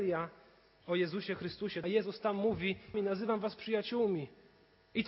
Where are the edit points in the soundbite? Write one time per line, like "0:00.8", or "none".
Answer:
0:01.8
0:02.9